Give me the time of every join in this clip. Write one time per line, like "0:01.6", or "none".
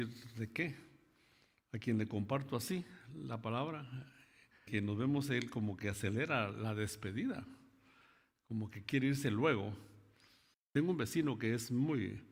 0:04.7
0:10.5

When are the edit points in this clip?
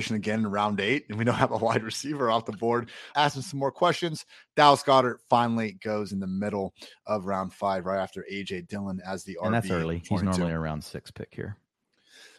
0:03.1

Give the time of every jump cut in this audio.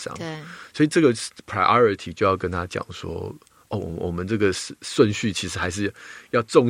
none

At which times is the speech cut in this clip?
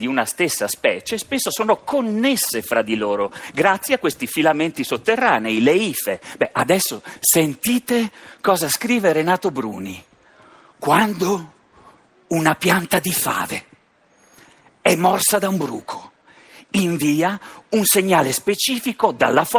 none

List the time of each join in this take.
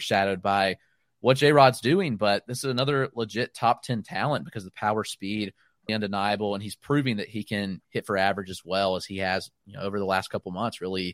0:05.9

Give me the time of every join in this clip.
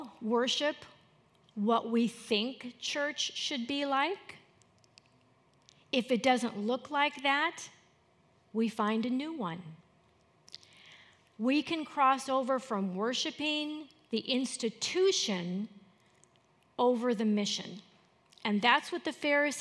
none

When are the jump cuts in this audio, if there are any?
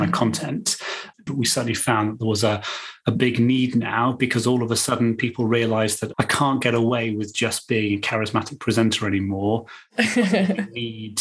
0:01.3
0:06.1

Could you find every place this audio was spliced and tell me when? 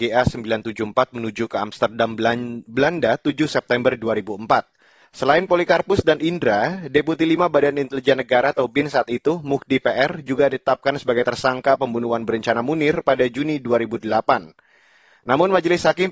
0:05.0

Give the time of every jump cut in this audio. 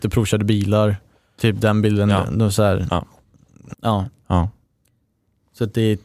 0:01.4
0:03.7

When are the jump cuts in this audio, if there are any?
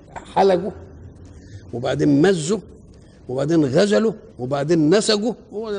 0:04.3

